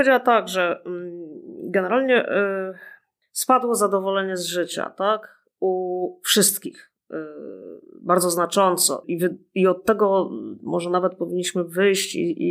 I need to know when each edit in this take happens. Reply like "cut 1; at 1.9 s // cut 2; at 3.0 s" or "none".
cut 1; at 9.0 s